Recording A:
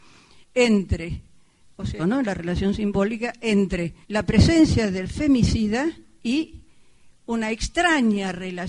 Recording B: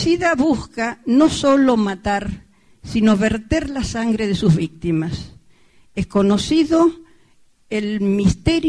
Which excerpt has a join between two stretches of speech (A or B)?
A